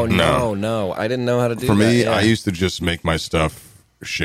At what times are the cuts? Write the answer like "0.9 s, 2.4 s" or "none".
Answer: 0.9 s